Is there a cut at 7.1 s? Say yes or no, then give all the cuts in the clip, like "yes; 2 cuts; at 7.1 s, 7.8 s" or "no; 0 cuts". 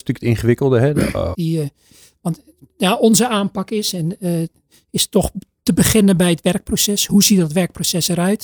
no; 1 cut; at 1.3 s